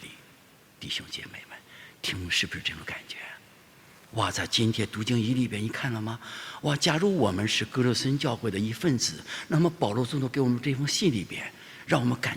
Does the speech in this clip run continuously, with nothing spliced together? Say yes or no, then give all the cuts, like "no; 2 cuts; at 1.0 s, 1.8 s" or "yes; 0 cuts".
yes; 0 cuts